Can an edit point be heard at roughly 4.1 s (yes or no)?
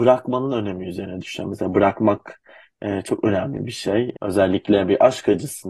yes